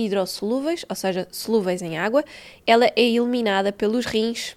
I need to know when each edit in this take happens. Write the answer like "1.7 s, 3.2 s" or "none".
2.6 s